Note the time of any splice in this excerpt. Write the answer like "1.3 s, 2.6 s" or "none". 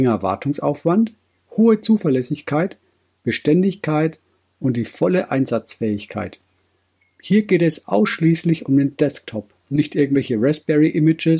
9.6 s